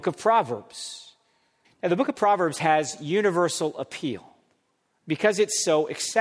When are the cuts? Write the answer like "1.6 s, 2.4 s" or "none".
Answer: 1.6 s